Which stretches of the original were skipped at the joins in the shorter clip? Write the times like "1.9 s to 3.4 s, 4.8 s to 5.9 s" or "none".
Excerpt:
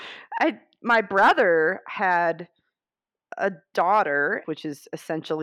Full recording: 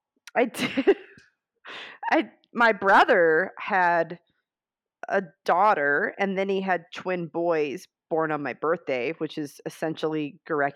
6.2 s to 9.2 s